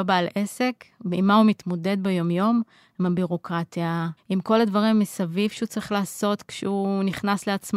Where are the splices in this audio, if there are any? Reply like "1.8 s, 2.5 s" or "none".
4.2 s